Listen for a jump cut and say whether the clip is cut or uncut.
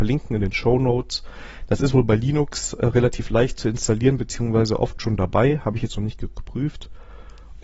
uncut